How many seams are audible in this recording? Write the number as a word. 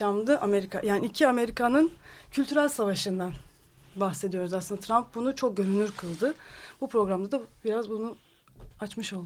zero